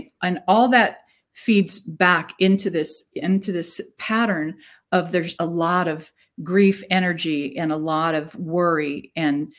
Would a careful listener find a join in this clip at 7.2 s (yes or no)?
no